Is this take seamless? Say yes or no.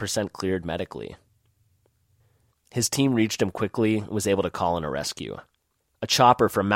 no